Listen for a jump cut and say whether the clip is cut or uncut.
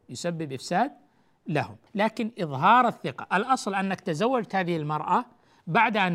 cut